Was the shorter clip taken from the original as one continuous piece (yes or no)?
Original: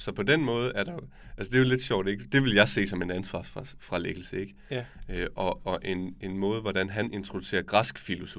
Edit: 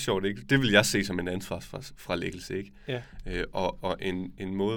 yes